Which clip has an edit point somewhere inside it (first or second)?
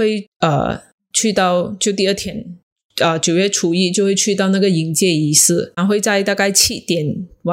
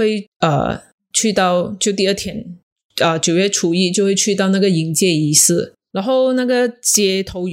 first